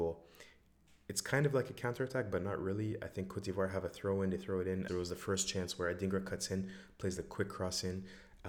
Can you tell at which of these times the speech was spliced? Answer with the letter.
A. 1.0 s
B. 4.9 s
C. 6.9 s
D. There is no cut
B